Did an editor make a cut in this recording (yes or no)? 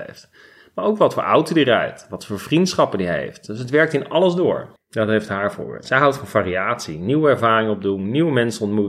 yes